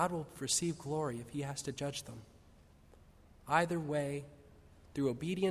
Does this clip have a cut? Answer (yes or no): no